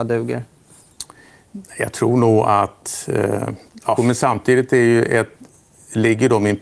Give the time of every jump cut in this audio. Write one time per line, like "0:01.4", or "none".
0:04.0

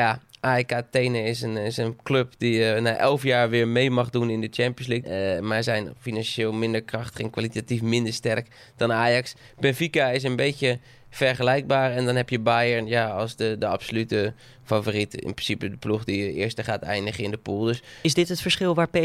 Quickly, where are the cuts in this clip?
0:05.0

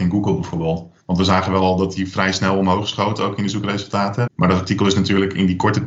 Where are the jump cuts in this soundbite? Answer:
0:01.0
0:04.3

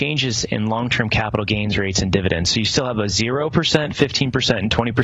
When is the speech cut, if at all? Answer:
none

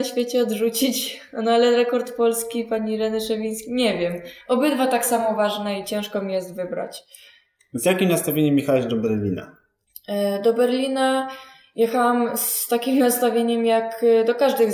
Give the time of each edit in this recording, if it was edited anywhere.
none

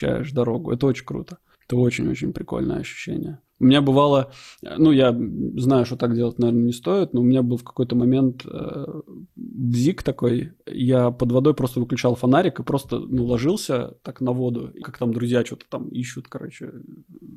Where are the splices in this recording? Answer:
0:03.5
0:14.8

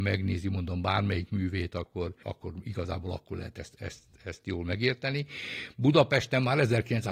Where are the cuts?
0:02.2

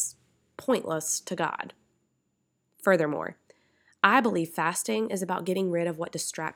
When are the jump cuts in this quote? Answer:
none

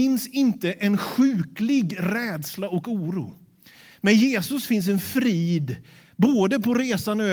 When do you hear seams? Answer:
none

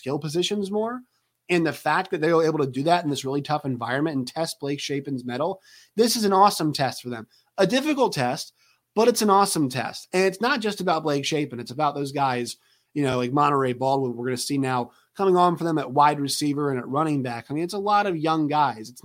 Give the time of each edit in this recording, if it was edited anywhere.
none

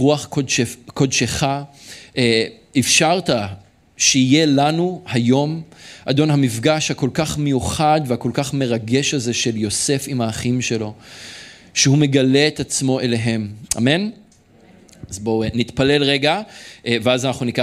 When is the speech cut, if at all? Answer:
0:13.7

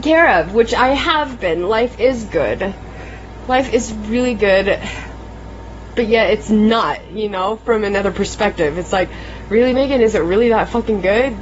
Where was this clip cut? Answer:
none

